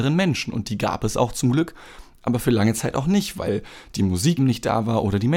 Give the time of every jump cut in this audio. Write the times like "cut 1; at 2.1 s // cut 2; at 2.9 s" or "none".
cut 1; at 4.4 s